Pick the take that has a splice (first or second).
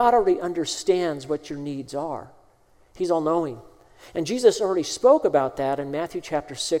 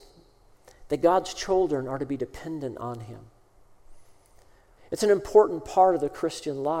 second